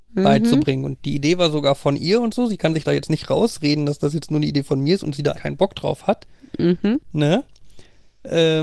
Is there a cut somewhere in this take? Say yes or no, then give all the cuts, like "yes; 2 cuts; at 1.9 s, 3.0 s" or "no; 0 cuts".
yes; 1 cut; at 5.3 s